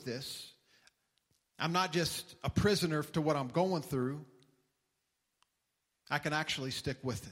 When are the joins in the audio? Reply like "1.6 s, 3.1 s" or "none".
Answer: none